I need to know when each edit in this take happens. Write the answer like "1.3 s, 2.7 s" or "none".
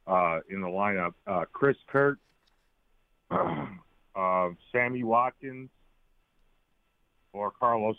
1.2 s